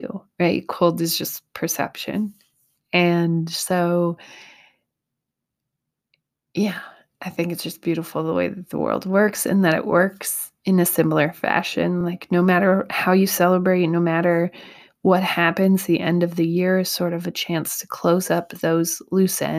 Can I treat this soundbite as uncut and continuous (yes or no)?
yes